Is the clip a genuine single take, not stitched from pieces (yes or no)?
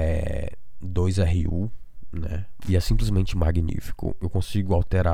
no